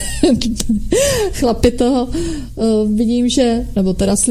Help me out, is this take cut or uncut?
uncut